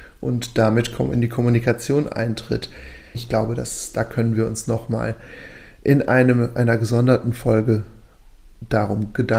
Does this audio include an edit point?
yes; 1 cut; at 3.1 s

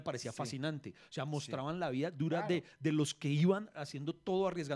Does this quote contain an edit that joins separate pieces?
no; 0 cuts

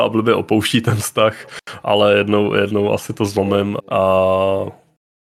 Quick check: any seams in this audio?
yes; 1 cut; at 3.8 s

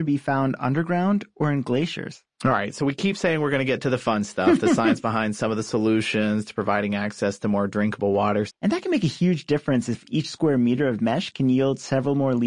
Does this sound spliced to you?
yes; 1 cut; at 8.5 s

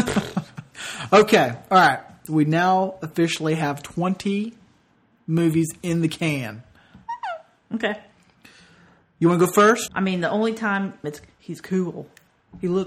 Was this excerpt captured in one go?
no; 3 cuts; at 2.3 s, 9.9 s, 11.0 s

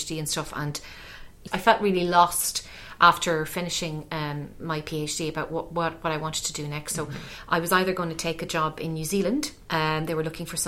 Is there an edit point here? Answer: no; 0 cuts

